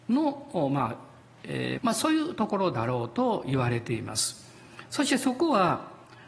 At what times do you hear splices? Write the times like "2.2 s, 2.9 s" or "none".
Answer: 1.8 s